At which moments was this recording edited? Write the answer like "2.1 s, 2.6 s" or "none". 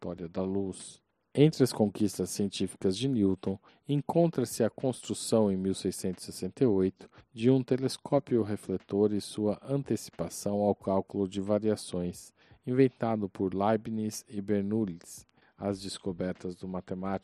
15.4 s